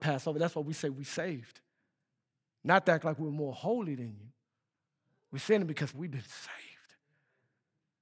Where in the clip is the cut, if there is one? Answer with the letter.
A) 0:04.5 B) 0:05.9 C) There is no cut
B